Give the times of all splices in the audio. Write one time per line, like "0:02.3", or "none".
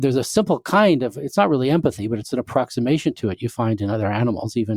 none

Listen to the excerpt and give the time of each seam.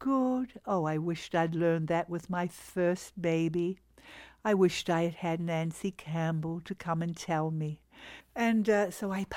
0:08.2

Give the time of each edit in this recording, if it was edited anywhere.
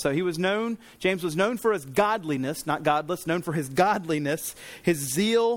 none

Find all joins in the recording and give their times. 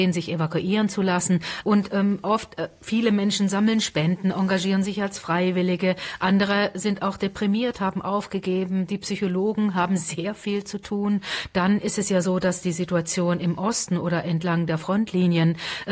0:01.6

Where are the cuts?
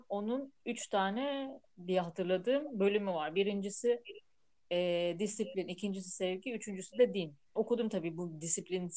0:07.6

